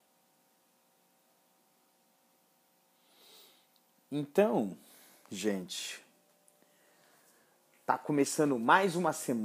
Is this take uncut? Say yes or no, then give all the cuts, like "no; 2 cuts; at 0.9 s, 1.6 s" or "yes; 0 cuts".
yes; 0 cuts